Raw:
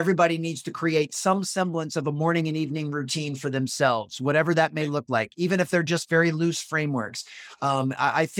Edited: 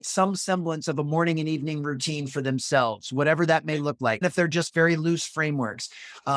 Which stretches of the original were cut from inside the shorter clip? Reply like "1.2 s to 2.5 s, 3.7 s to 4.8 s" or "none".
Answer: 5.3 s to 5.6 s